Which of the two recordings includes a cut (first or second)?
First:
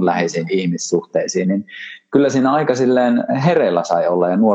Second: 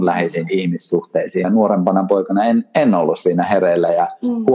second